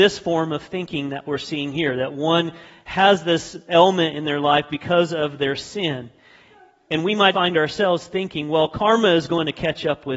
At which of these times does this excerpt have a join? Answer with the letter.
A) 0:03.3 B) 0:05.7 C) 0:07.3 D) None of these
C